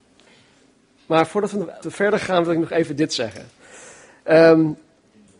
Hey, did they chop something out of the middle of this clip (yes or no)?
yes